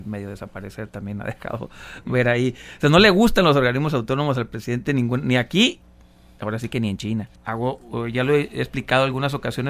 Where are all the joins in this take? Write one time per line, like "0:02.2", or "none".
0:07.4